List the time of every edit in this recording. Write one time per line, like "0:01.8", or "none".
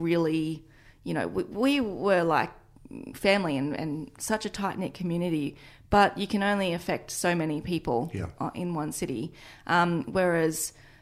0:03.8